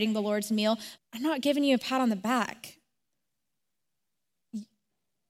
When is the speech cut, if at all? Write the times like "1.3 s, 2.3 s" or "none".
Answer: 1.0 s